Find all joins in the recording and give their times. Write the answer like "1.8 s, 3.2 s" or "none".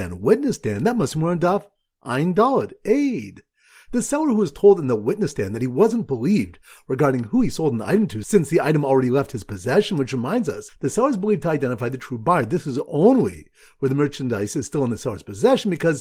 10.7 s